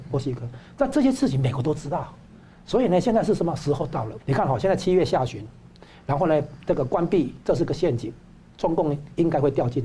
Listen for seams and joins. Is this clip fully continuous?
no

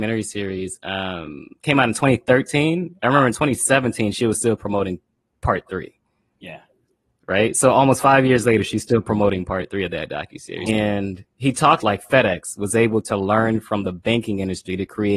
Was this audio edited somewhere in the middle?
yes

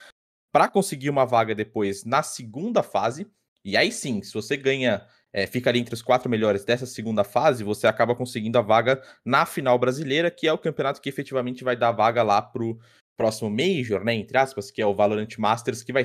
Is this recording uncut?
yes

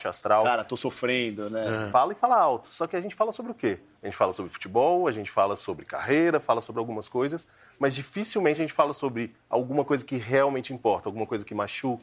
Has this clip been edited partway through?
yes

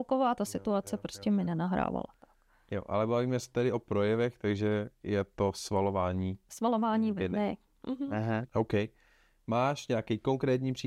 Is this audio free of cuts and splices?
no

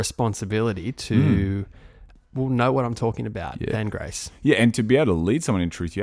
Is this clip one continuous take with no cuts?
no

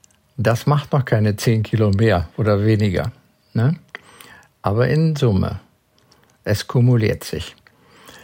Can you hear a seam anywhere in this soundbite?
no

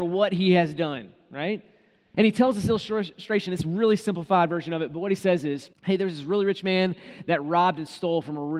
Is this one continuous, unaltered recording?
no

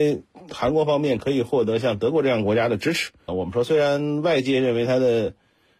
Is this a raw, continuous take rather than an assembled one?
no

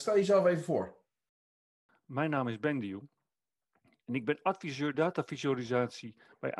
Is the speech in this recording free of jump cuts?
yes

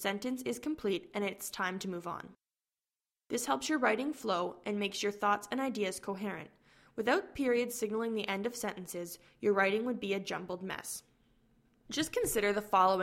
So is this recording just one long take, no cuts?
yes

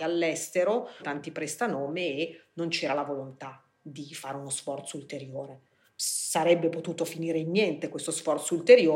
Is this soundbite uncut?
no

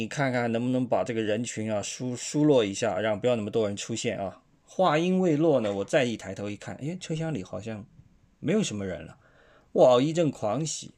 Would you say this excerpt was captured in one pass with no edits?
yes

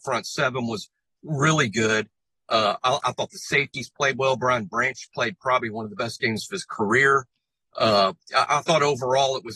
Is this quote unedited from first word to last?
yes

